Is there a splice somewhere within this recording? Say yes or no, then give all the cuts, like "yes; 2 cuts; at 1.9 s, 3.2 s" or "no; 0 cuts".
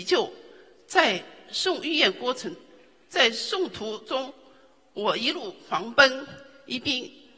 no; 0 cuts